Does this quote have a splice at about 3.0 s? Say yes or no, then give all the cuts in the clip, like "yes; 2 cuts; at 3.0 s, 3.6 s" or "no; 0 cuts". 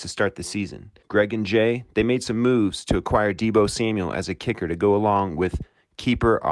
no; 1 cut; at 1.0 s